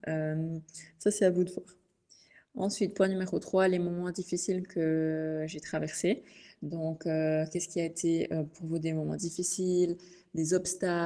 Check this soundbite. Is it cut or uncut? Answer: uncut